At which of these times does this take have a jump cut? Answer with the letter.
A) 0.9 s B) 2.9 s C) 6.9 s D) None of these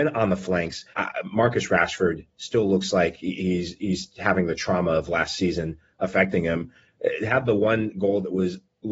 A